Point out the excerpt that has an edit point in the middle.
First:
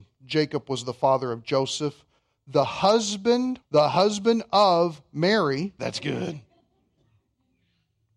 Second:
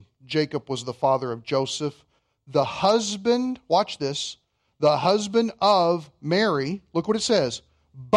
first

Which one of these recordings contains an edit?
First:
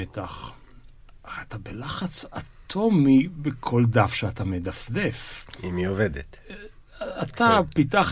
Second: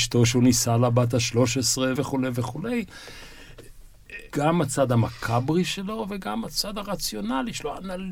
second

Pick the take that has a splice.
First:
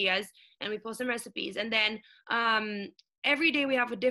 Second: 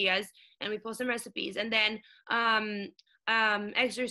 second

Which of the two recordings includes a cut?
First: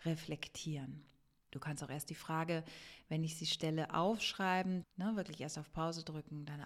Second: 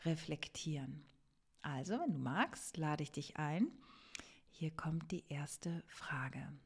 first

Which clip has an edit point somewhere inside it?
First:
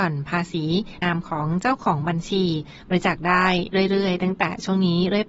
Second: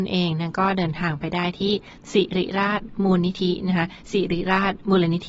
first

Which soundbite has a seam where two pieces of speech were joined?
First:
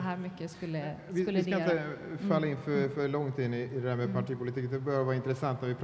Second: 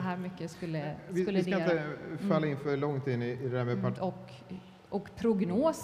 second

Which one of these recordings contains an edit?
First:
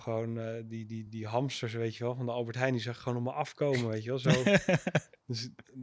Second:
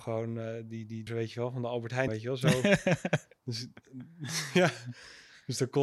second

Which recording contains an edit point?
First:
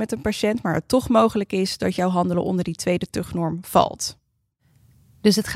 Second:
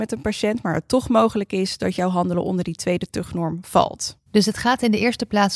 second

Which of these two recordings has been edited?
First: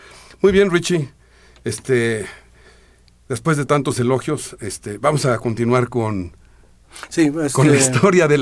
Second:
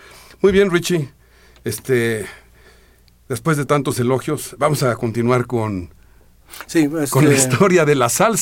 second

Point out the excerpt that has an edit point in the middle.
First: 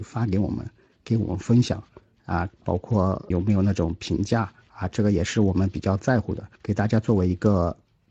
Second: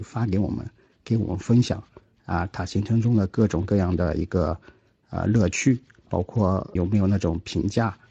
first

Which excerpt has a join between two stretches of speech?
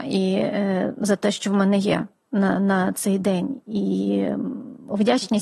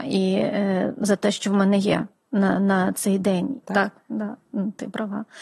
second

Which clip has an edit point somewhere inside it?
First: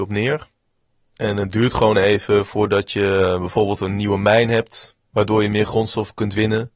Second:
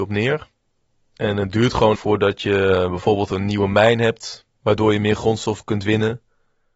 second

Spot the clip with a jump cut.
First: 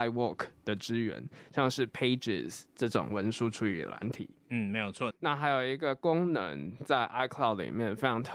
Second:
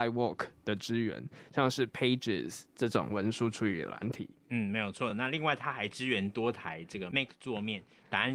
first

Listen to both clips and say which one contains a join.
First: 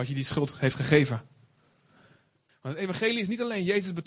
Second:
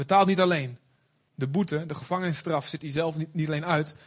first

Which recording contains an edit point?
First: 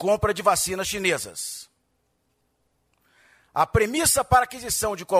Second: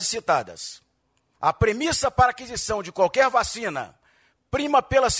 second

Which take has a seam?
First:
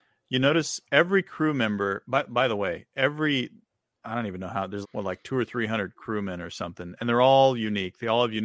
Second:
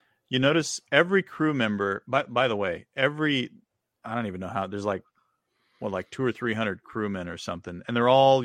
first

